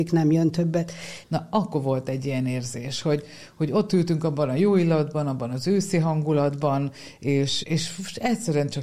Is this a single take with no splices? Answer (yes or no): no